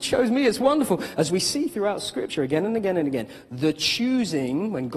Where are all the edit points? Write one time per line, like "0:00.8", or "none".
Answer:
none